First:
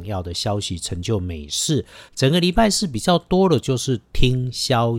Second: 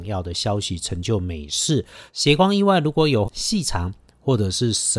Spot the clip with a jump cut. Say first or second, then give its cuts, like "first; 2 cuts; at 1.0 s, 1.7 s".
second; 2 cuts; at 2.1 s, 3.2 s